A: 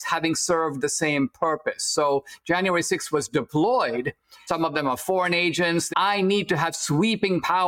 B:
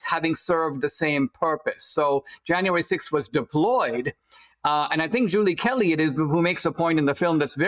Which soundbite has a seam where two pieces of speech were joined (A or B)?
A